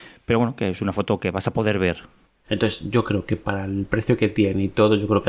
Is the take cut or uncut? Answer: cut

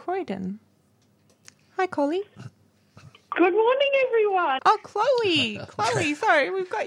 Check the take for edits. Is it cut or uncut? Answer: cut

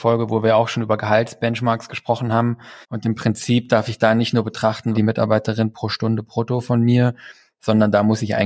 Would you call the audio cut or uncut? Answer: cut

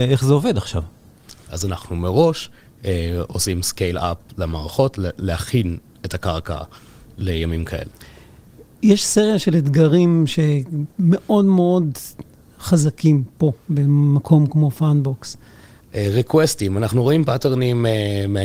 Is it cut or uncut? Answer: cut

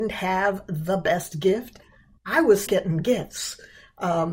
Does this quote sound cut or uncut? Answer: cut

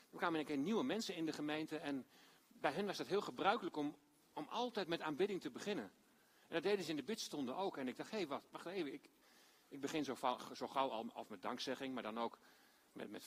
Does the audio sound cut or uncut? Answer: uncut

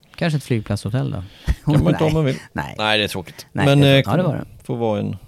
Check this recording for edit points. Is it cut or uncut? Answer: cut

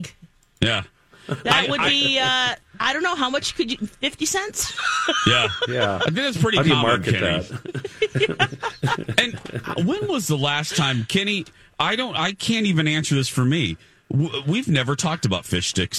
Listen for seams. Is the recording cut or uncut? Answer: uncut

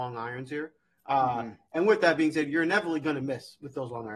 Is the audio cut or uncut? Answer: uncut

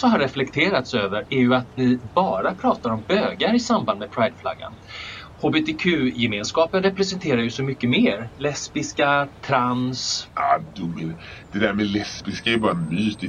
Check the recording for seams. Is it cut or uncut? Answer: uncut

